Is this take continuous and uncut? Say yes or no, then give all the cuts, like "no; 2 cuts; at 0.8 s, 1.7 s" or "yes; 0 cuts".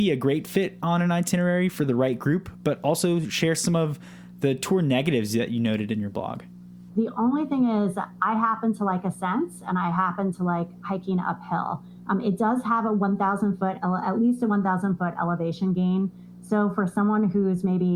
no; 1 cut; at 6.9 s